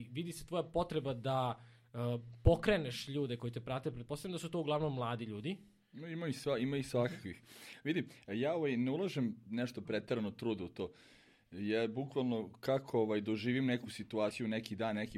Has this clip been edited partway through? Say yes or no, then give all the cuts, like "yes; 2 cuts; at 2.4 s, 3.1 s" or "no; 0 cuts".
no; 0 cuts